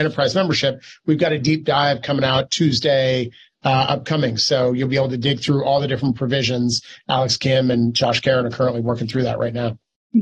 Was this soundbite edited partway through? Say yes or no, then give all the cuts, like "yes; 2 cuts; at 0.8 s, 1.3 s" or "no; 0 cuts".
no; 0 cuts